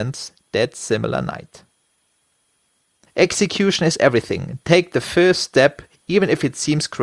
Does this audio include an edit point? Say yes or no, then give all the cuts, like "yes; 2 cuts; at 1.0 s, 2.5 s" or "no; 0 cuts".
yes; 1 cut; at 3.1 s